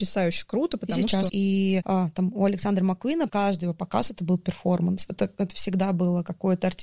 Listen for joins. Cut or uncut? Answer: cut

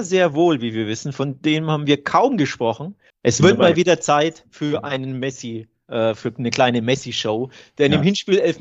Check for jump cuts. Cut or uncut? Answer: cut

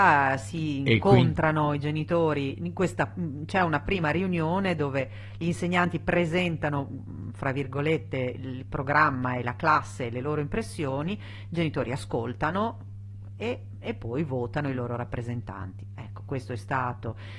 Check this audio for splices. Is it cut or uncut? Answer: uncut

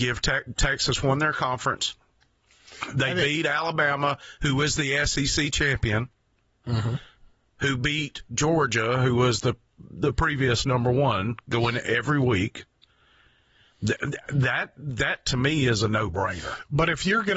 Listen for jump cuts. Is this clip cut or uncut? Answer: uncut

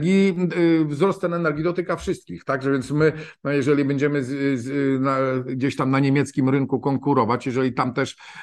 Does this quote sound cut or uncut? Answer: uncut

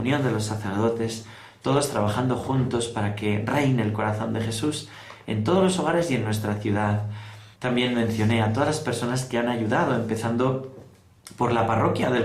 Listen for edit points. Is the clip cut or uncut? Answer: cut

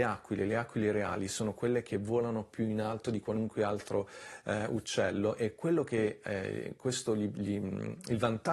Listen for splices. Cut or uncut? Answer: uncut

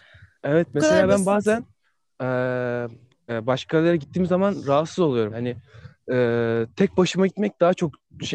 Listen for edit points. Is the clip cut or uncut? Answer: cut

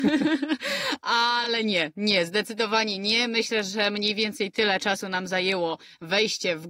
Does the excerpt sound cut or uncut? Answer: uncut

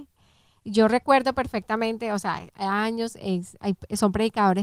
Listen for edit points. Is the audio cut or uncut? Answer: cut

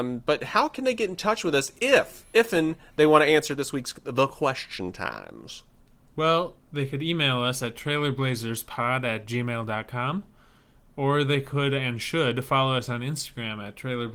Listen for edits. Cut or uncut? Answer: uncut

